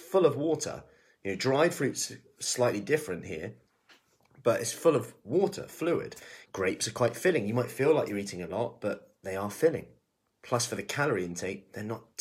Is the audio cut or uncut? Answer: cut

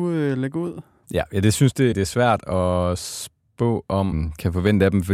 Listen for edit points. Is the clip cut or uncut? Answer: cut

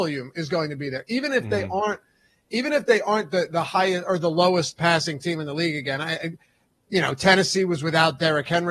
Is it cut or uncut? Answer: uncut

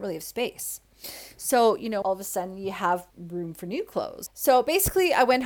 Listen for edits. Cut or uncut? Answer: cut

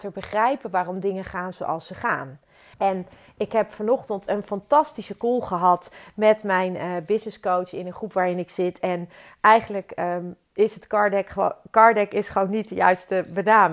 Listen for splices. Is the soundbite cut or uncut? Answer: cut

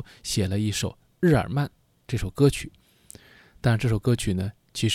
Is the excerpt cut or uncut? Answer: uncut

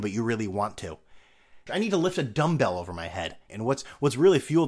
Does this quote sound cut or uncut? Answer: cut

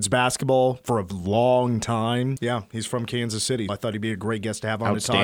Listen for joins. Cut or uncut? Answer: cut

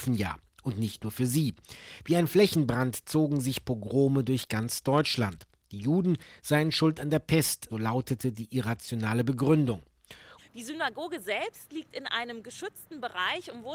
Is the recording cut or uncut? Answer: cut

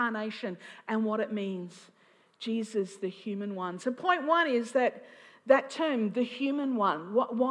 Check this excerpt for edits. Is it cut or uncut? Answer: uncut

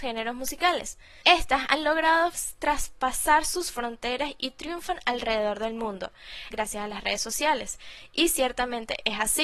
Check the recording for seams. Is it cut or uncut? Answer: cut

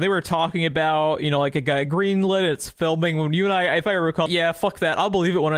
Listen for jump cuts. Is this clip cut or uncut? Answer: cut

